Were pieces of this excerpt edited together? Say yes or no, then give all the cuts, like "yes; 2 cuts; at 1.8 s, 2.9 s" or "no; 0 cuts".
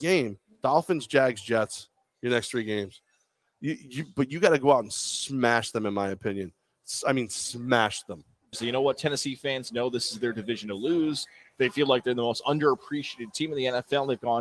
yes; 1 cut; at 8.5 s